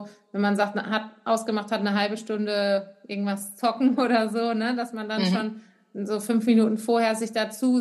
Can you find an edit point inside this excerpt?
no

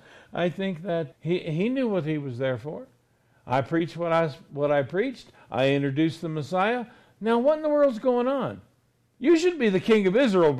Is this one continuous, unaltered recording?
no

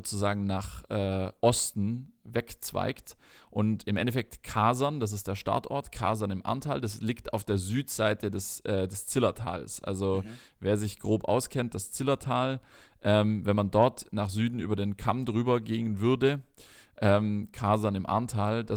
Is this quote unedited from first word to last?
yes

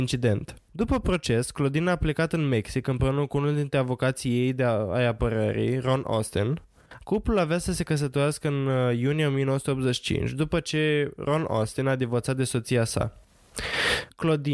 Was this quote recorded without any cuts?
no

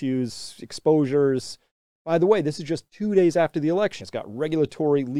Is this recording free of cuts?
no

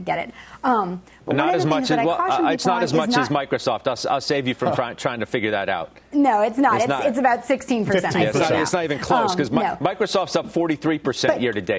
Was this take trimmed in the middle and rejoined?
no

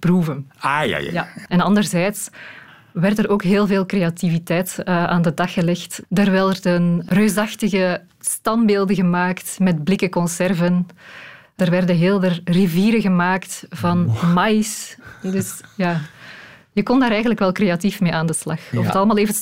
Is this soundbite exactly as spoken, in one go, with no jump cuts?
no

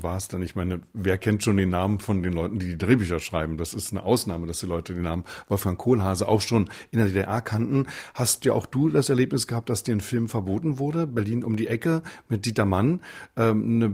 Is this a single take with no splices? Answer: yes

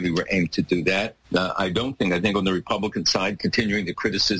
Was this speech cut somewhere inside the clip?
yes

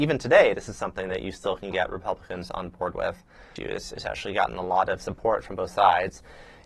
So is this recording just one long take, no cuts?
no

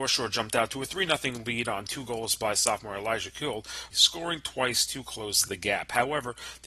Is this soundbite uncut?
no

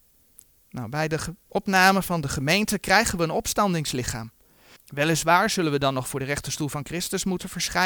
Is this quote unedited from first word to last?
no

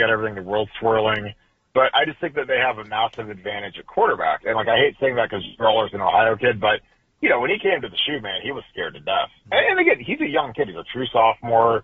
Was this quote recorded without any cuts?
yes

